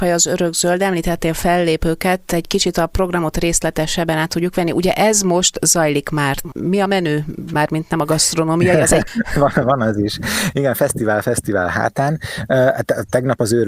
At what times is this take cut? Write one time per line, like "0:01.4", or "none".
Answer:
0:06.6

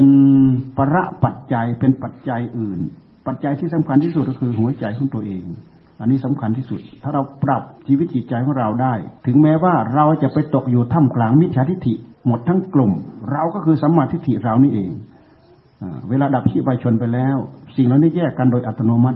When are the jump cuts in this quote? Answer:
0:07.8
0:09.2
0:12.1

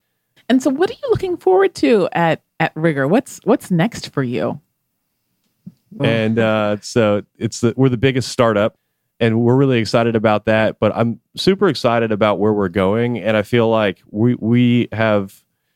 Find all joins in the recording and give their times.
0:06.0

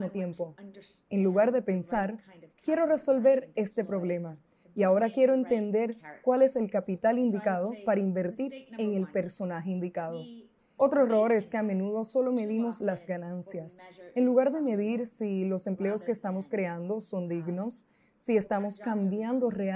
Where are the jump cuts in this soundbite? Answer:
0:10.8

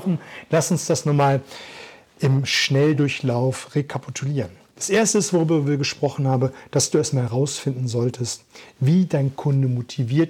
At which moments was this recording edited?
none

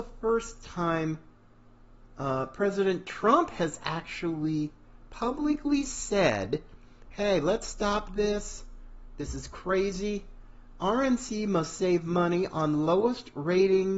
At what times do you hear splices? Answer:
0:10.7

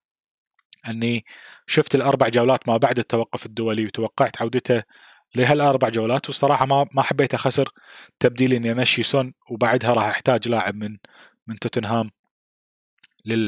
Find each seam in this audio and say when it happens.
none

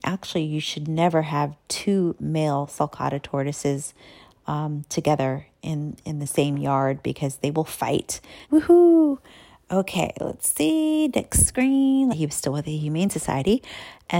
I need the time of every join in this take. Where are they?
0:08.4
0:12.1

